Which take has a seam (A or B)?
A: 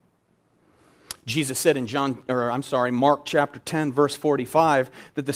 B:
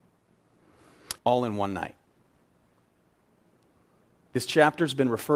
B